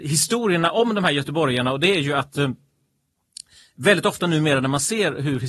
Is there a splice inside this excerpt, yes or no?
no